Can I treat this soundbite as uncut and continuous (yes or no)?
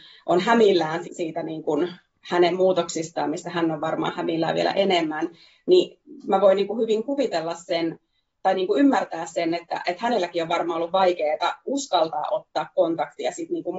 no